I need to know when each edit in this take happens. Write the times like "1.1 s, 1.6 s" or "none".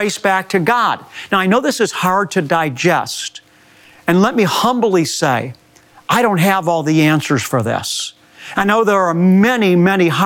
none